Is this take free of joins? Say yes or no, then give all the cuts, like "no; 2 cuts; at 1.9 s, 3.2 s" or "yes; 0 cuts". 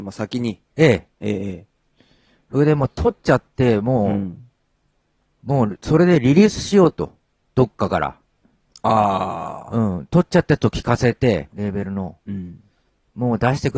no; 1 cut; at 11.5 s